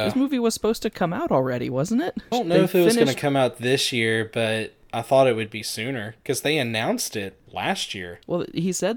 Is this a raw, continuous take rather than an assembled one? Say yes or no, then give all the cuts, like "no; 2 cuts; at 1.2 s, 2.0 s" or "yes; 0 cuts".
no; 2 cuts; at 2.3 s, 7.5 s